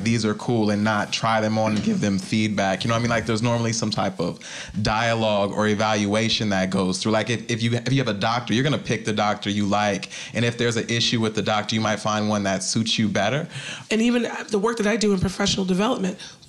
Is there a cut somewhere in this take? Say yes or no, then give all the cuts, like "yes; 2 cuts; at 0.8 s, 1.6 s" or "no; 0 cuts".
yes; 1 cut; at 13.9 s